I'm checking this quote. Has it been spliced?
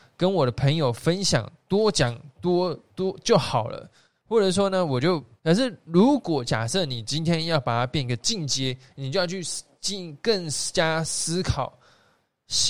yes; 2 cuts; at 5.4 s, 8.9 s

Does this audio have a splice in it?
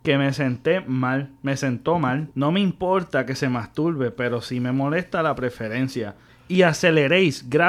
yes; 2 cuts; at 2.3 s, 6.3 s

